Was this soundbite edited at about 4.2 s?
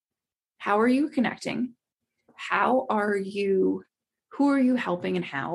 no; 1 cut; at 2.3 s

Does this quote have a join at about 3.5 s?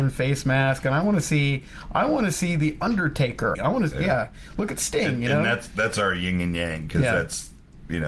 yes; 1 cut; at 3.5 s

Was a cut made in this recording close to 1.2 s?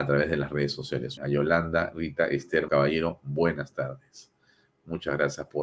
yes; 2 cuts; at 1.2 s, 2.7 s

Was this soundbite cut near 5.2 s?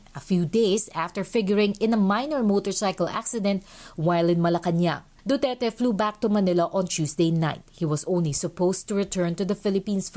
no; 0 cuts

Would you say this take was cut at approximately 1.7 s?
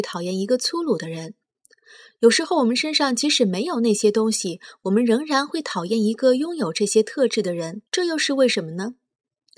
no; 1 cut; at 7.9 s

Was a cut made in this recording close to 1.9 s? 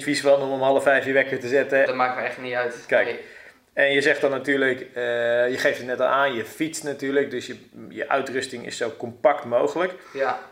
yes; 1 cut; at 1.9 s

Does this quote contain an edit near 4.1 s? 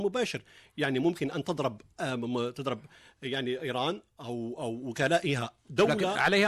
no; 0 cuts

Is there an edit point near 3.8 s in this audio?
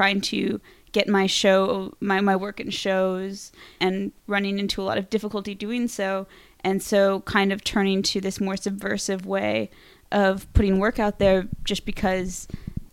yes; 1 cut; at 3.8 s

